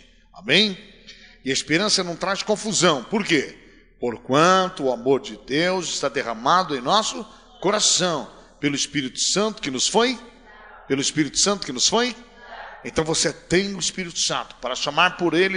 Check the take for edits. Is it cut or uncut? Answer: uncut